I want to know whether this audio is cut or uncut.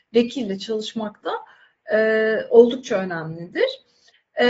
uncut